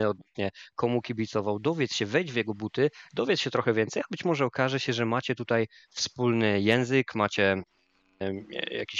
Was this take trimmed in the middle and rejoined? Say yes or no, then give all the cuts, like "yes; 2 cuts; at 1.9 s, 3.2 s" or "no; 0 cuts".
no; 0 cuts